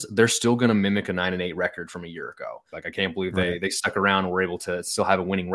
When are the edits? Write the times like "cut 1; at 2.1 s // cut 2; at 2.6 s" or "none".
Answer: cut 1; at 2.7 s